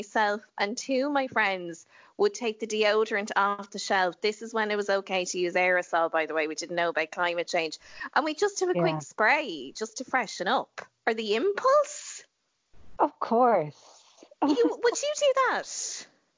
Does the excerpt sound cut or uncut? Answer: uncut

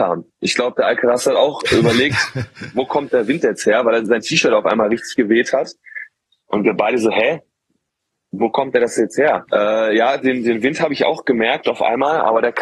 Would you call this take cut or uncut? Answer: cut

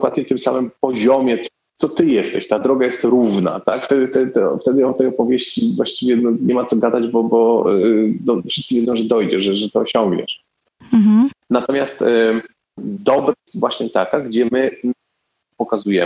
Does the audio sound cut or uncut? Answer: cut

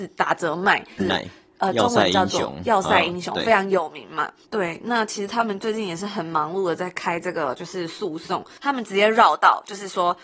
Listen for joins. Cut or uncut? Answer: cut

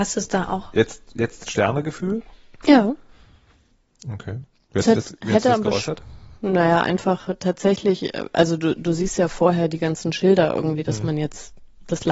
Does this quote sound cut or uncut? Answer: uncut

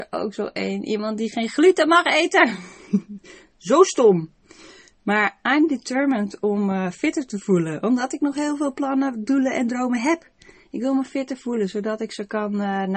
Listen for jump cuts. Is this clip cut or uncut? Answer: uncut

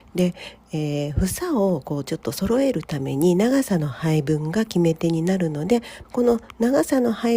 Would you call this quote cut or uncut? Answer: cut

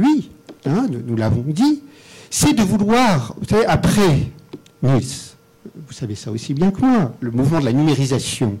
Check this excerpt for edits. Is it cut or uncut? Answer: uncut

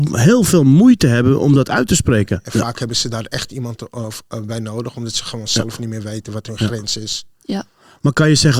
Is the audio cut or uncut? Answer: cut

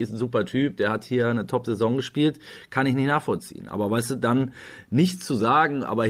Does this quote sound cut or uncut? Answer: uncut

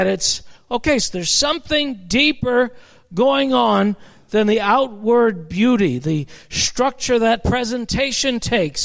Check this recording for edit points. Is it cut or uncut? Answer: cut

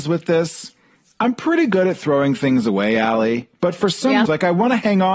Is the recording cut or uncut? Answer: cut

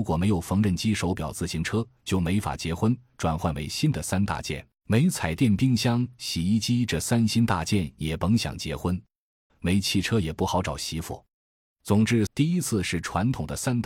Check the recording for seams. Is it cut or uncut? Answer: cut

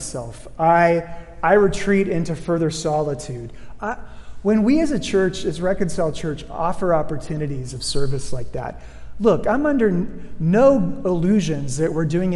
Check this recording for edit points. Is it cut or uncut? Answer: cut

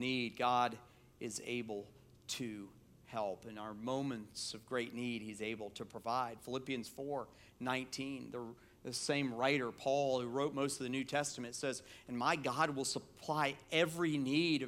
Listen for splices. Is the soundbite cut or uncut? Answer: uncut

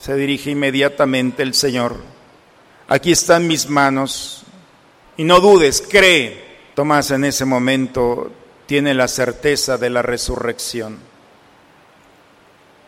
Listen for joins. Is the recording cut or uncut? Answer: cut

